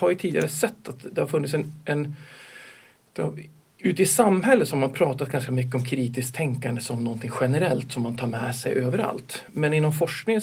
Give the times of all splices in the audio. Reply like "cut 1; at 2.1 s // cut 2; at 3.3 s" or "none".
none